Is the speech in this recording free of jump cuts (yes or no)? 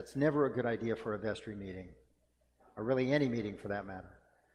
yes